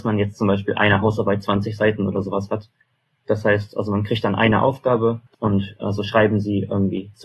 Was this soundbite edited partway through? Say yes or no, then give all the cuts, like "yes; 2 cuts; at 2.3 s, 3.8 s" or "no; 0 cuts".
no; 0 cuts